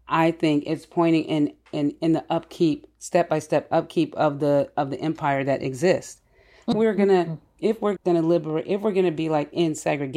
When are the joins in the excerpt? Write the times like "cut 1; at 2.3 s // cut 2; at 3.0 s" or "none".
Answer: cut 1; at 6.7 s // cut 2; at 8.0 s